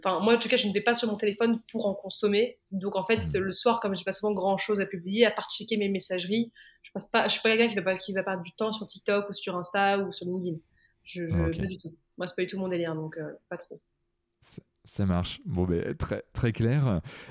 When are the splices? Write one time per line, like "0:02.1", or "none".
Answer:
none